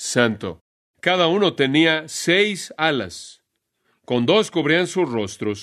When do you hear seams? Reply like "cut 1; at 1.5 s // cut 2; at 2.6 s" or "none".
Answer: cut 1; at 0.9 s